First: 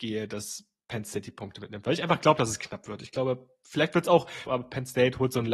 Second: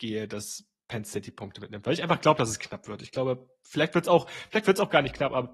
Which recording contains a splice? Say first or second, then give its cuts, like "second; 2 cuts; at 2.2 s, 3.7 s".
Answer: first; 1 cut; at 4.5 s